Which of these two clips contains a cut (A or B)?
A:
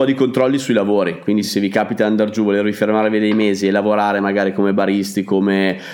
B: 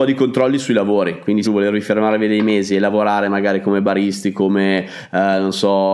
B